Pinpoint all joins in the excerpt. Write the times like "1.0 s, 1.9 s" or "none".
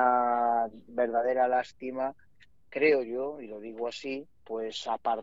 none